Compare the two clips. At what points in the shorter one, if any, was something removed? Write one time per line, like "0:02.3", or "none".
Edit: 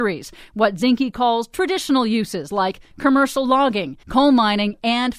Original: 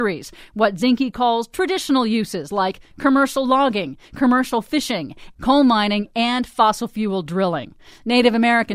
0:04.0